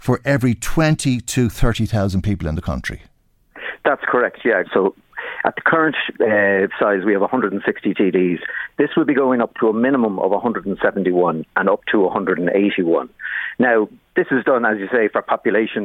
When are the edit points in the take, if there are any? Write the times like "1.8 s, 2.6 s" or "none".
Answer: 4.6 s, 6.1 s

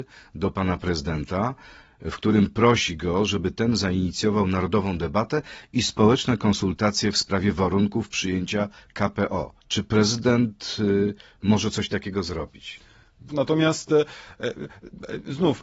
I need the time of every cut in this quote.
9.6 s, 13.3 s

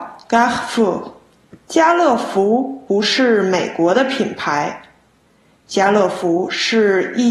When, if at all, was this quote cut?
1.6 s

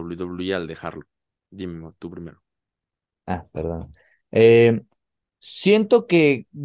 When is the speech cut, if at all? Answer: 1.4 s

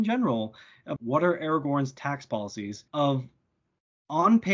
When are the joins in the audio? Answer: 1.0 s, 2.9 s

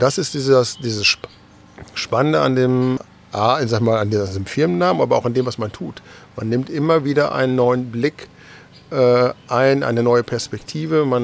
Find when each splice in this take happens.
3.0 s

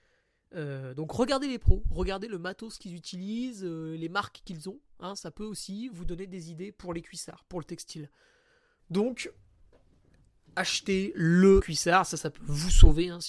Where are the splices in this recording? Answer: 8.8 s, 11.6 s

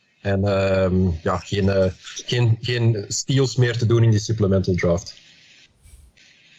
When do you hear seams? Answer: none

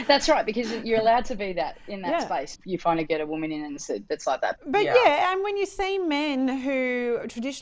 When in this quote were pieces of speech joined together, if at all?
2.6 s, 4.6 s

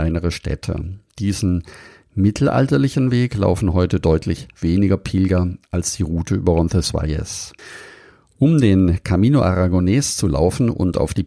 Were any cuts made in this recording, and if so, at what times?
none

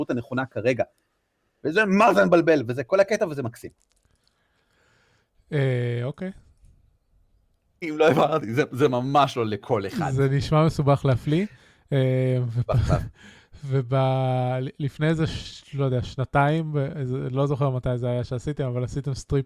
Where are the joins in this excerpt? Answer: 7.8 s

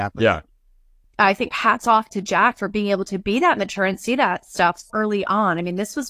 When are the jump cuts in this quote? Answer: 1.0 s, 4.9 s

